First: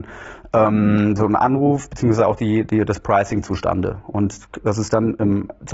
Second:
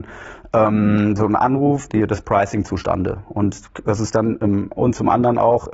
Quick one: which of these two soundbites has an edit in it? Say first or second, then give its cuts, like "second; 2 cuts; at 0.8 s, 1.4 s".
second; 2 cuts; at 1.9 s, 4.8 s